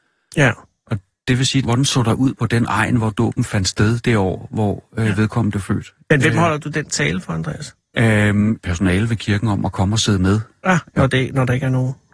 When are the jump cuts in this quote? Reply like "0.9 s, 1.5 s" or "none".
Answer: 1.6 s, 8.6 s, 10.9 s